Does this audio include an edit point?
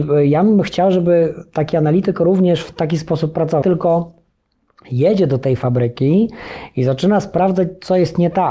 yes; 1 cut; at 3.6 s

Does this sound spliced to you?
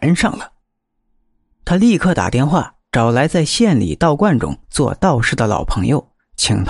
no; 0 cuts

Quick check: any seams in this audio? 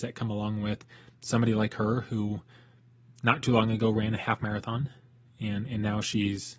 no; 0 cuts

